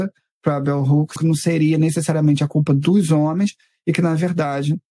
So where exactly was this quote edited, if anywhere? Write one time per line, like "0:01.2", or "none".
0:01.2